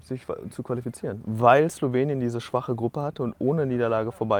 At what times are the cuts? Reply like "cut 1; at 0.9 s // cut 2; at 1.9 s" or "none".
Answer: none